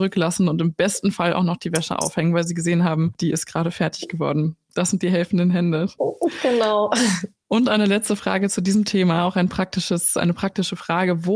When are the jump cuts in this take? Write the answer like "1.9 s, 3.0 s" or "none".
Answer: 6.0 s